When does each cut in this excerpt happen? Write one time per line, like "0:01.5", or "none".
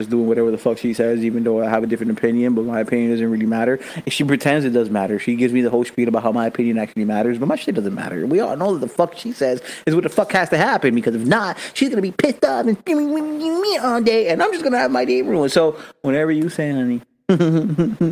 none